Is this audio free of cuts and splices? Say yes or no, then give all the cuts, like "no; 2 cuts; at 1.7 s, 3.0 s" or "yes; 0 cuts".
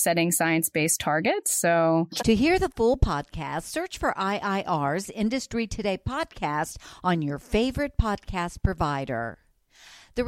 no; 1 cut; at 2.2 s